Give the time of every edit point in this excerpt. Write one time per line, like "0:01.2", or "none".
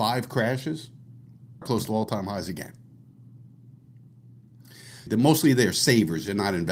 0:01.6
0:05.1